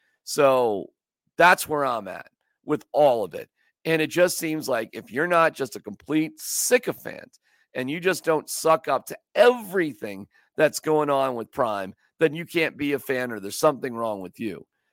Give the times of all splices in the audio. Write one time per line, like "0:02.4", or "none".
none